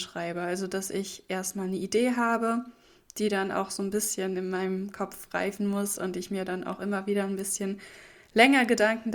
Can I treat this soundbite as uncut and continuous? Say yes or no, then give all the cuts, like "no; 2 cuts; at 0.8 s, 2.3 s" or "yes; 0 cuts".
yes; 0 cuts